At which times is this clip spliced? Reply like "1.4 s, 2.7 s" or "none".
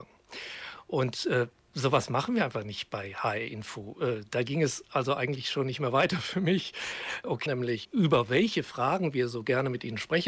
7.5 s